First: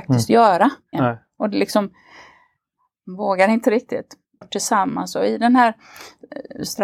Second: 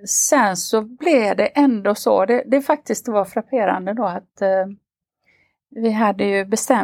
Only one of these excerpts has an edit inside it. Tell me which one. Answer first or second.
first